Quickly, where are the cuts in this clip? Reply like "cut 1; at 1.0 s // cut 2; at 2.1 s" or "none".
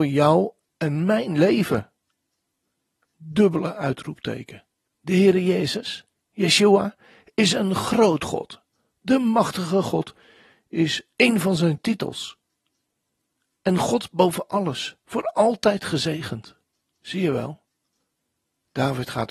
cut 1; at 4.9 s // cut 2; at 16.9 s